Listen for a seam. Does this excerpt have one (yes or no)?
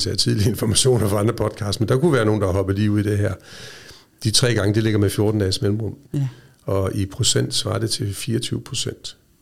yes